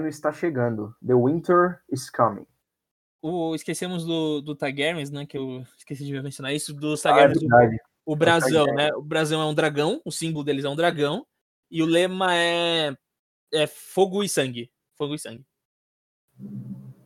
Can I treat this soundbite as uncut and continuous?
yes; 0 cuts

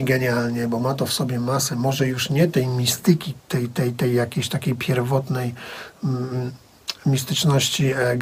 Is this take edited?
no; 0 cuts

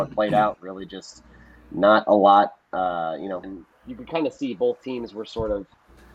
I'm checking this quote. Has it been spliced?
yes; 1 cut; at 3.4 s

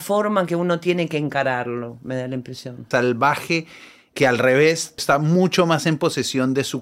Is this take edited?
yes; 2 cuts; at 2.9 s, 5.0 s

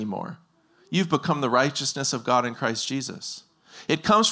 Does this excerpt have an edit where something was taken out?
no; 0 cuts

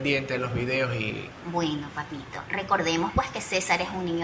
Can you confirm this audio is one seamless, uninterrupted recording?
no; 1 cut; at 1.4 s

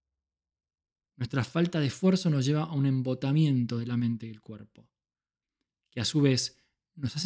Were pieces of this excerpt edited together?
yes; 1 cut; at 1.0 s

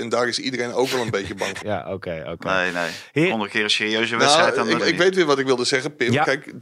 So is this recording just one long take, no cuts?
no; 2 cuts; at 1.6 s, 4.8 s

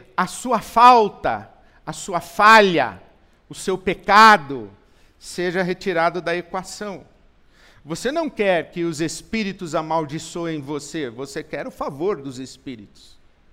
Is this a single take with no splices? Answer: yes; 0 cuts

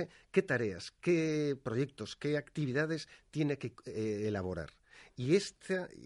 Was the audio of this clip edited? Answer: no; 0 cuts

